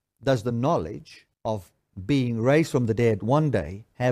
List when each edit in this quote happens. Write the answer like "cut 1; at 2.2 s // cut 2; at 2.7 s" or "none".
cut 1; at 1.3 s